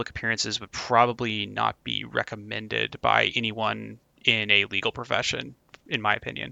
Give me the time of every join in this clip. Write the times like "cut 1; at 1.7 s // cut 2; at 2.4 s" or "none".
none